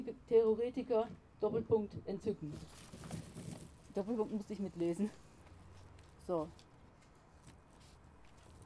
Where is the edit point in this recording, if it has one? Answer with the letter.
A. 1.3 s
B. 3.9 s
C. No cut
C